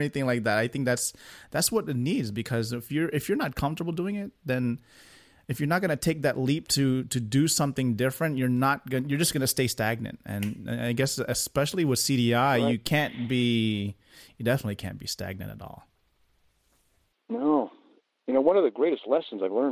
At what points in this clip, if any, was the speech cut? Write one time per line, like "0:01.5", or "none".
none

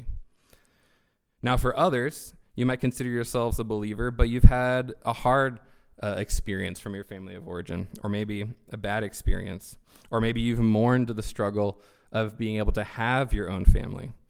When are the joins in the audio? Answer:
none

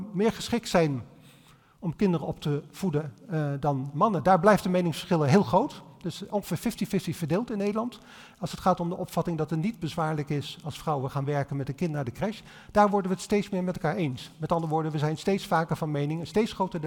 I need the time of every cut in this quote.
none

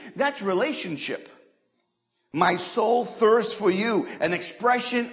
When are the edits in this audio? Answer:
none

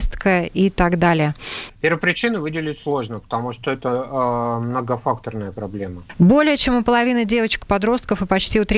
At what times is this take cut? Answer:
0:06.1

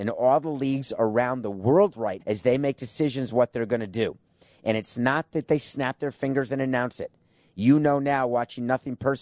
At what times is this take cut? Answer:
0:02.2

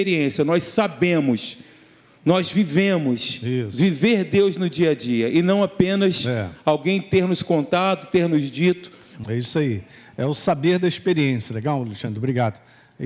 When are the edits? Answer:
0:09.2

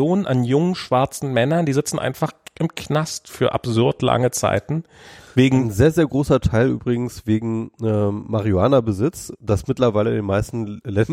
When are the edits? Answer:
none

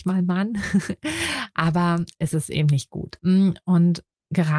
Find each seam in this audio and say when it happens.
0:03.2

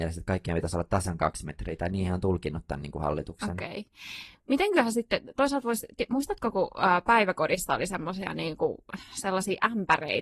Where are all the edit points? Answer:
none

